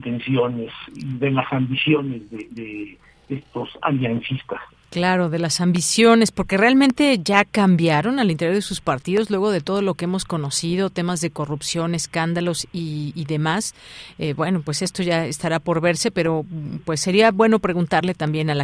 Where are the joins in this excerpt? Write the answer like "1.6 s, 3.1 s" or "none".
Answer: none